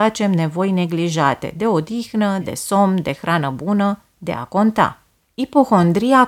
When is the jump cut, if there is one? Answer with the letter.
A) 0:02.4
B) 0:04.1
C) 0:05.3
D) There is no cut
A